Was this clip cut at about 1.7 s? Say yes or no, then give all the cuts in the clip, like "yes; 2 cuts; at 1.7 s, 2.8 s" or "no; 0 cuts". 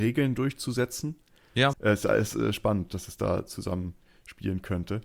yes; 1 cut; at 1.7 s